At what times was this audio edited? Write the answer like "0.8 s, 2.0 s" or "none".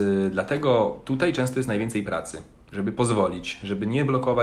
none